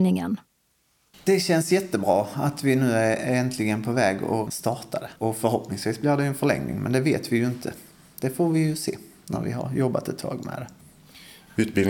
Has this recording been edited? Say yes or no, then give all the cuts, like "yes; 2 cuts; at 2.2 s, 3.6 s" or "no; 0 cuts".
yes; 1 cut; at 5.2 s